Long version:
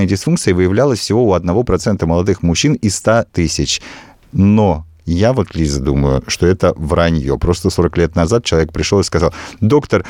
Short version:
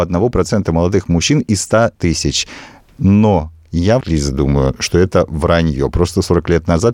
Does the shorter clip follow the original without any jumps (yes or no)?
no